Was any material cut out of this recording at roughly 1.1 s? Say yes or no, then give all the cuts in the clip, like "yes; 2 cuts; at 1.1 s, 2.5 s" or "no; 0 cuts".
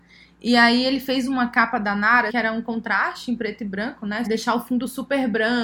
no; 2 cuts; at 2.3 s, 4.3 s